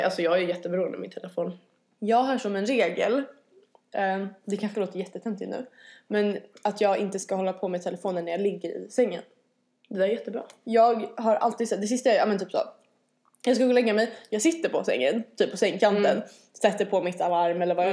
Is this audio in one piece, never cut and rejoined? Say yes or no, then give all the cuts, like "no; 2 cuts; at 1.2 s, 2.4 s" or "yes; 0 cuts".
yes; 0 cuts